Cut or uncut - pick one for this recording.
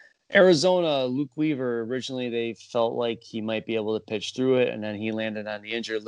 uncut